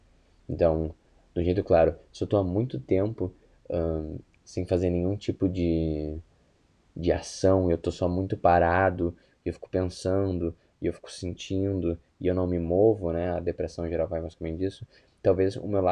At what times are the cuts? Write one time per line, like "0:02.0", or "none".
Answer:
none